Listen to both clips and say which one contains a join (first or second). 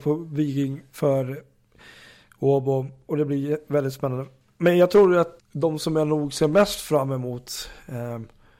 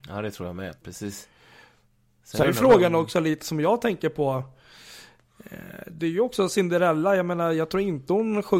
first